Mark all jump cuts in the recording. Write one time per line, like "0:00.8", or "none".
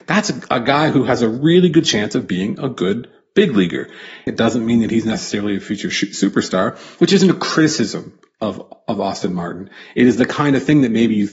0:04.3